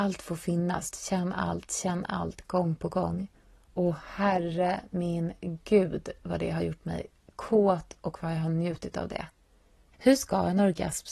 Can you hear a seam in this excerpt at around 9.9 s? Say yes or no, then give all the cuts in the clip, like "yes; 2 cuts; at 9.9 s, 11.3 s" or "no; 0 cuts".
yes; 2 cuts; at 0.9 s, 9.9 s